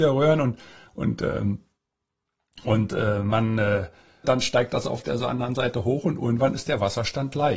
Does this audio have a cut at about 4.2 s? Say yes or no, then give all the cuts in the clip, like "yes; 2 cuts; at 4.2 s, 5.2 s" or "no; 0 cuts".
yes; 1 cut; at 4.2 s